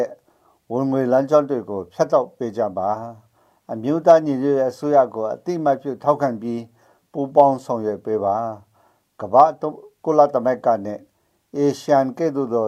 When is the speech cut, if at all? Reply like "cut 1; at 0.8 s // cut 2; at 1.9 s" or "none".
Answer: none